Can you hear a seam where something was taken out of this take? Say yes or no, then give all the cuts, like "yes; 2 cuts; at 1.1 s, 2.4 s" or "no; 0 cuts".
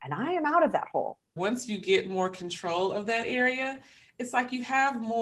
yes; 1 cut; at 1.4 s